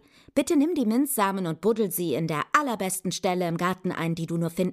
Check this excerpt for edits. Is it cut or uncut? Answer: uncut